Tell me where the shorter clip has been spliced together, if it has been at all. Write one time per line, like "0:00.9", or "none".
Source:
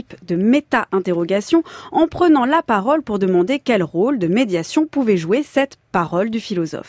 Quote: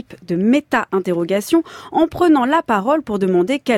none

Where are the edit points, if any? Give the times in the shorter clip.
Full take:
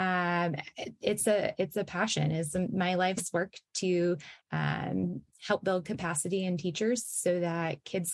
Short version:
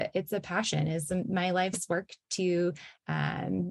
none

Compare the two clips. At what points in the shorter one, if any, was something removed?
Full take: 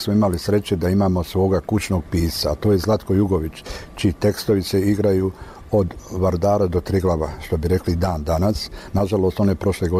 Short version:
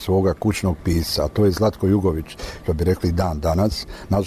0:02.6

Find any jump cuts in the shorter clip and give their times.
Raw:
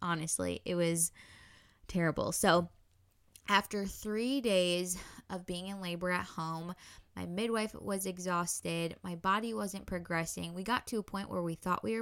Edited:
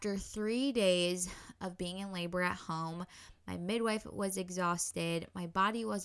none

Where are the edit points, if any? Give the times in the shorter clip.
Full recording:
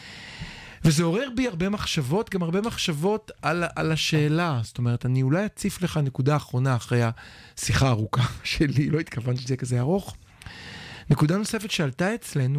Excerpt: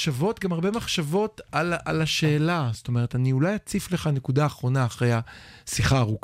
none

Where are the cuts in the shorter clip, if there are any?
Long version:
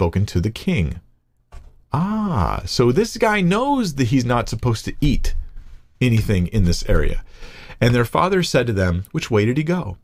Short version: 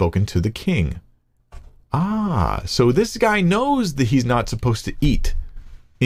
none

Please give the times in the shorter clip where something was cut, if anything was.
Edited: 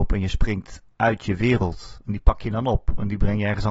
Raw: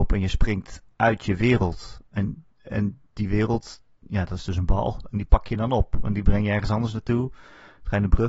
0:02.0

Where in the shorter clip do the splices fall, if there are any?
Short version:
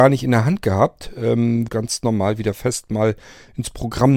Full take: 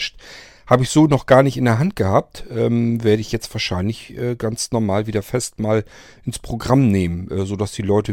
0:01.7

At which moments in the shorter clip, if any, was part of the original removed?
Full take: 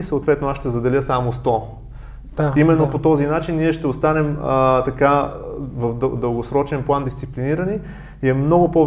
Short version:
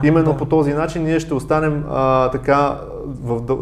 none

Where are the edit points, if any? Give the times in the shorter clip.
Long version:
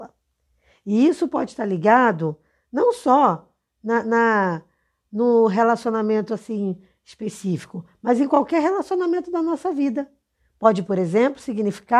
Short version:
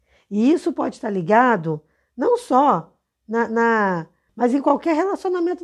0:04.3

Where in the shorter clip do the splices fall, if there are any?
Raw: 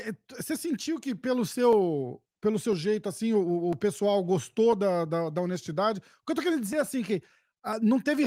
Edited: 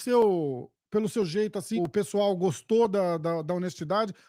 0:01.8

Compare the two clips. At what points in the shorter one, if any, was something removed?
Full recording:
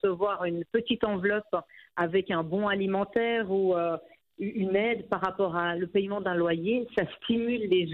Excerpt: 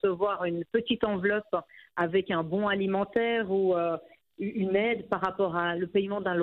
none

